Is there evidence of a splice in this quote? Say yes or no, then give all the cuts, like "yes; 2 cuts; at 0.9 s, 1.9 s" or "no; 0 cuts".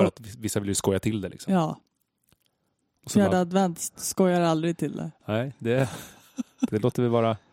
no; 0 cuts